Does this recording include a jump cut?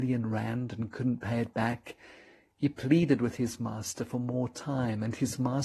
no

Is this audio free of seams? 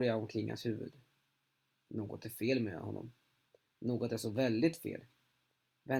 yes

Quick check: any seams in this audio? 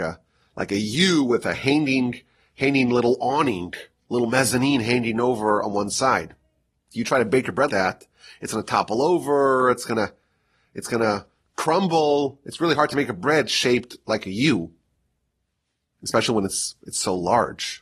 yes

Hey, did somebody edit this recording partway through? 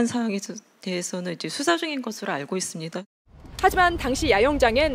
no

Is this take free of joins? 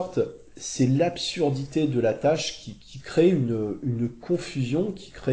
yes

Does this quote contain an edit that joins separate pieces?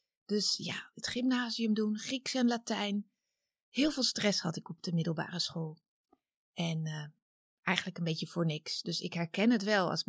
yes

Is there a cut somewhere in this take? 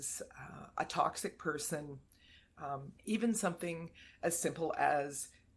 yes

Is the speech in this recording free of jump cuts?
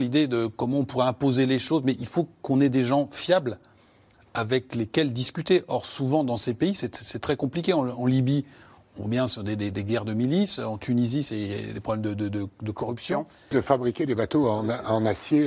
no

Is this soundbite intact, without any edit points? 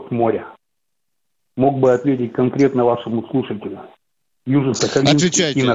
yes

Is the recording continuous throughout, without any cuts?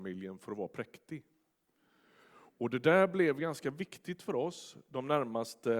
yes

